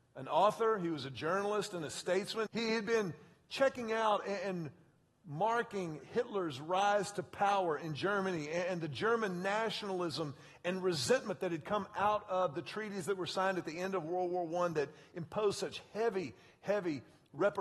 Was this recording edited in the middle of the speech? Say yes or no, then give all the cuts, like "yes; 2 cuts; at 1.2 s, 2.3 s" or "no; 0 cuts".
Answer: yes; 1 cut; at 2.5 s